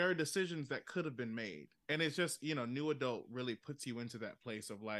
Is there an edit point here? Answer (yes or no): yes